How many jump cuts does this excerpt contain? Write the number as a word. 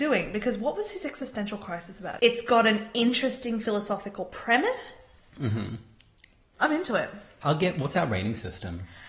two